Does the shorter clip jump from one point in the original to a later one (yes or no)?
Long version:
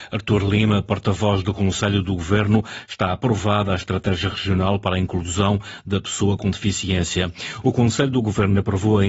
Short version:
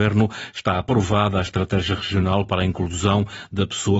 no